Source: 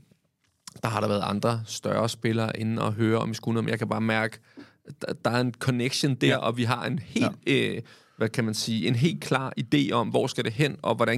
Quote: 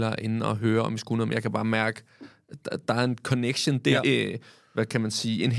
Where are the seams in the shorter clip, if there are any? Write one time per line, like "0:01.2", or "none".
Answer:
0:04.0